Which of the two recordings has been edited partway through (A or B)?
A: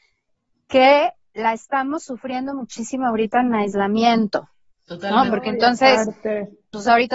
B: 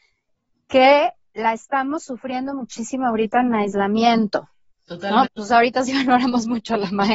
B